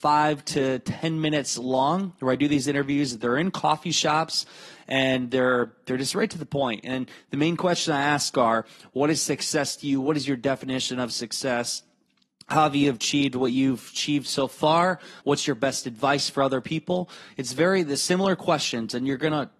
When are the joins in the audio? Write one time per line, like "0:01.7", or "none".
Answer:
0:15.2